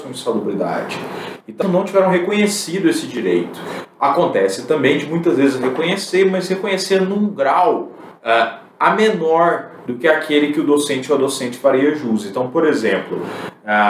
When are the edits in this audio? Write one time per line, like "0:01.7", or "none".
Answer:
0:01.6